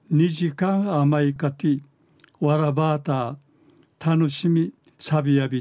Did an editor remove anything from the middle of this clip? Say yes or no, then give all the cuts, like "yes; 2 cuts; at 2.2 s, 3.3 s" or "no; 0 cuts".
yes; 1 cut; at 1.4 s